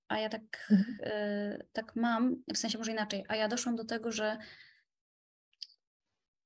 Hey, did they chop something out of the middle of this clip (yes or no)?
yes